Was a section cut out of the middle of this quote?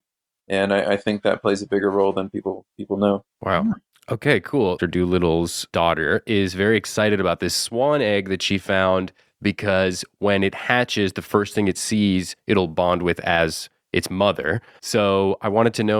yes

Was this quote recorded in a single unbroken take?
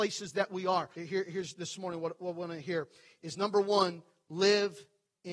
no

